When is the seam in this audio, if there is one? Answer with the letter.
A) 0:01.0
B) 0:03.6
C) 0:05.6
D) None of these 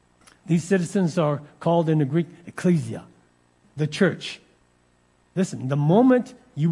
B